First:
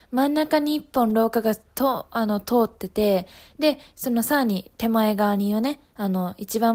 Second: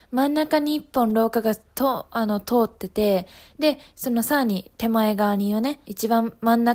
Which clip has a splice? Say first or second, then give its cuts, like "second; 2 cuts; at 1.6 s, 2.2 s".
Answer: second; 1 cut; at 5.8 s